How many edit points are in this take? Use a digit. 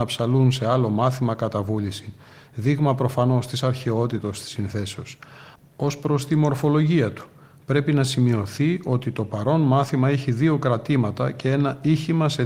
1